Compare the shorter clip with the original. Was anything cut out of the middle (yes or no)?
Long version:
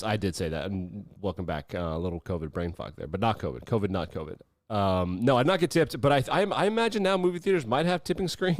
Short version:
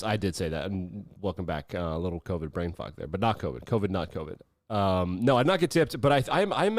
no